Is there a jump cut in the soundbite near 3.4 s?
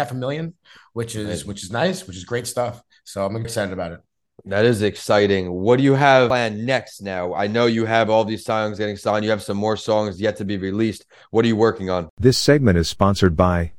yes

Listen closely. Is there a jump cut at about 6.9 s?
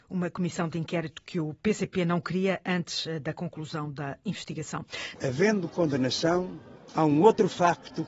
no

